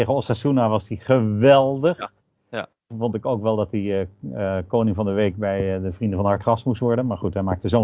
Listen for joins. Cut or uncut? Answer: uncut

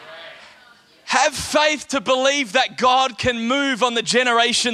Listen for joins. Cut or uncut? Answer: uncut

